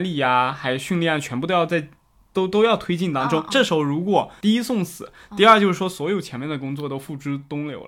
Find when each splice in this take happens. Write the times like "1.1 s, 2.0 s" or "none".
4.4 s